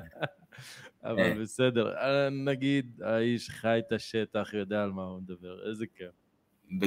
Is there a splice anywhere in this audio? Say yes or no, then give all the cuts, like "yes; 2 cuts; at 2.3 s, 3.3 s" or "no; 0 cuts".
no; 0 cuts